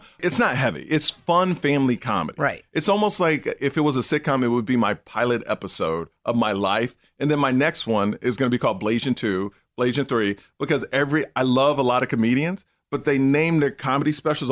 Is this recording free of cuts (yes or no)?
yes